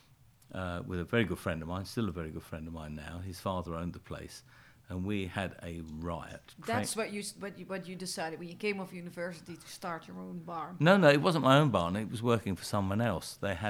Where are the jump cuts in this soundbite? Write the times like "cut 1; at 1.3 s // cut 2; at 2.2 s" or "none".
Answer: none